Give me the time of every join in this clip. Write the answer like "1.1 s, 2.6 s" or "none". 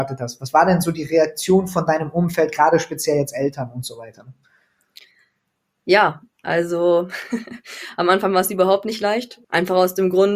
9.4 s